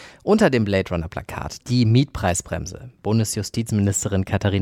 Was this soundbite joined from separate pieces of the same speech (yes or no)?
yes